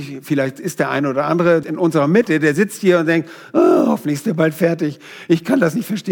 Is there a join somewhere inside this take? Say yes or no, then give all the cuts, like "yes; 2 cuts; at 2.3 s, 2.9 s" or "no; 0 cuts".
yes; 1 cut; at 1.6 s